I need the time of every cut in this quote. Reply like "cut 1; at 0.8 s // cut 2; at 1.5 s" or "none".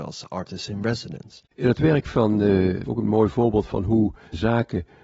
cut 1; at 1.5 s // cut 2; at 2.9 s

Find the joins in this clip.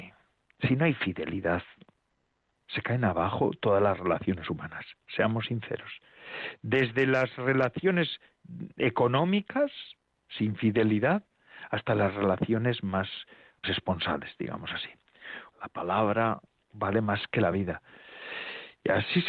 cut 1; at 13.6 s // cut 2; at 15.5 s

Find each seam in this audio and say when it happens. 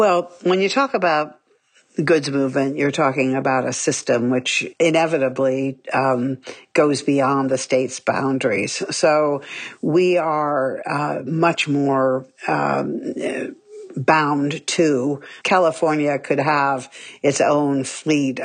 cut 1; at 15.4 s

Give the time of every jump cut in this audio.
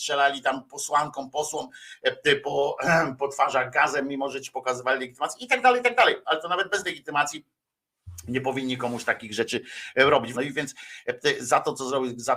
cut 1; at 10.3 s

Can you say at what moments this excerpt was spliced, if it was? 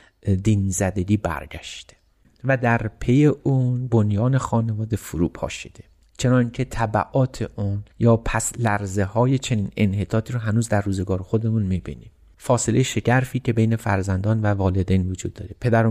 cut 1; at 7.9 s

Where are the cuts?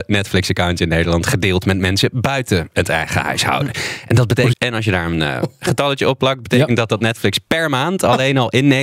cut 1; at 4.5 s

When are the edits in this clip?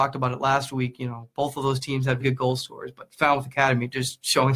cut 1; at 2.2 s

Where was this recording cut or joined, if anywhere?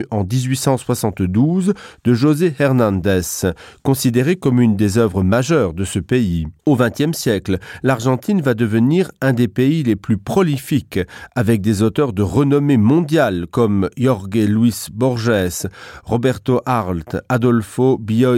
cut 1; at 6.6 s

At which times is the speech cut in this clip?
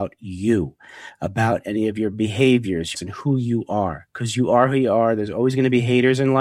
cut 1; at 2.9 s

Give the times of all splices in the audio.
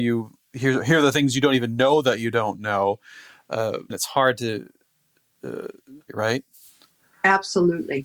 cut 1; at 3.9 s // cut 2; at 6.1 s

